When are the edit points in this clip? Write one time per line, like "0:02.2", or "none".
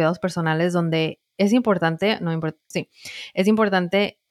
0:02.7